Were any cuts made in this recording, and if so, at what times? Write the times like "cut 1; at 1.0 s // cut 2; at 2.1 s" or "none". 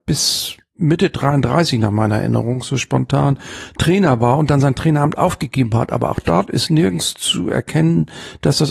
none